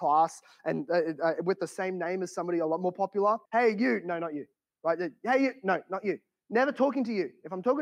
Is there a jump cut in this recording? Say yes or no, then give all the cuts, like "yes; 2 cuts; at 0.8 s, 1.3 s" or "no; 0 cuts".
yes; 1 cut; at 3.5 s